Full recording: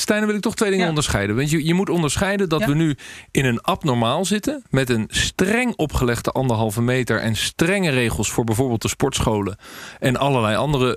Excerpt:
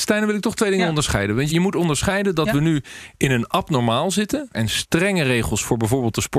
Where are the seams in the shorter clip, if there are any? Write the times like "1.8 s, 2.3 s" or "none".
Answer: 1.5 s, 4.5 s